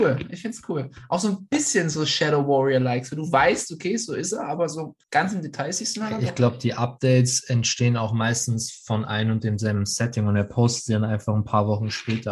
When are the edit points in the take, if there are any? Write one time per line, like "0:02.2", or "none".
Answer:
0:05.0